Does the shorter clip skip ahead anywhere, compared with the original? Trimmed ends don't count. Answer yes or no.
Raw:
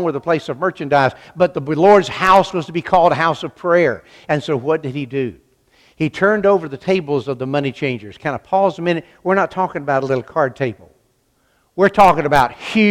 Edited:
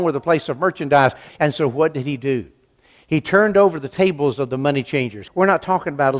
yes